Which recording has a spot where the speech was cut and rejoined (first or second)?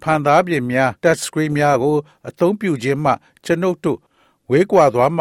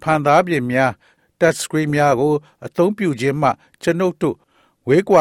first